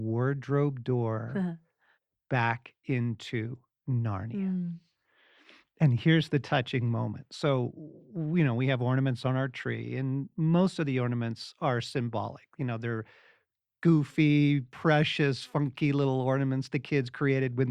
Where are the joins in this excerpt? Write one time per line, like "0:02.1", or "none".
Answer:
none